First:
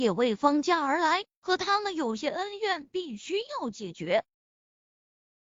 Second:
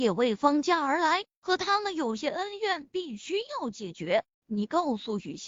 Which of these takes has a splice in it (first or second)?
second